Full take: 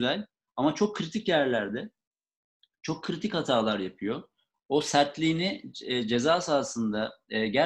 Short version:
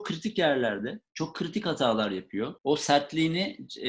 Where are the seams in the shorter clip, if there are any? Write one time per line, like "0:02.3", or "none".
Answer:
0:01.1
0:02.6